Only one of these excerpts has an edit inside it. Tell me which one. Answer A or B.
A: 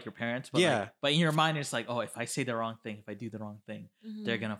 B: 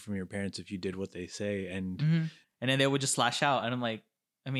B